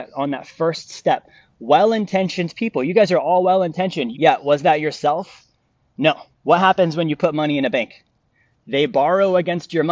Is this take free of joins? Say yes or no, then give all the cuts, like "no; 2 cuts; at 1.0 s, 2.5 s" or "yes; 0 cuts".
no; 2 cuts; at 4.1 s, 6.3 s